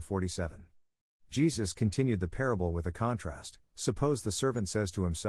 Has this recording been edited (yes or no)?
yes